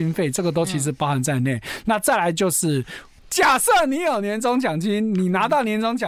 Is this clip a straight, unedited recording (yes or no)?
no